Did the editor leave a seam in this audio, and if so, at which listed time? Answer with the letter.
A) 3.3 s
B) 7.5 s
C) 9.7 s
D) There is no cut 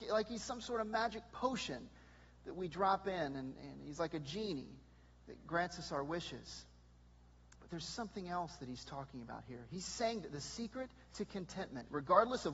B